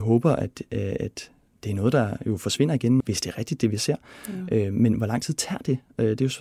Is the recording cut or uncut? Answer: cut